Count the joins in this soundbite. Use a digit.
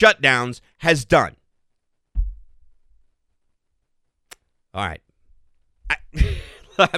1